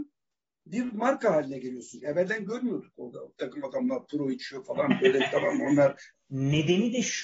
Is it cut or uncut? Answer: cut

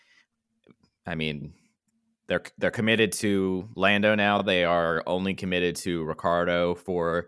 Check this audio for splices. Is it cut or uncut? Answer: uncut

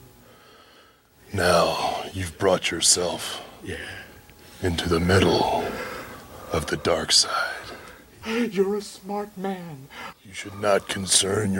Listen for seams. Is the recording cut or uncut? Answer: cut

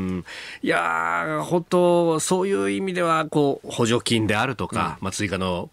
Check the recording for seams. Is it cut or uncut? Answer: uncut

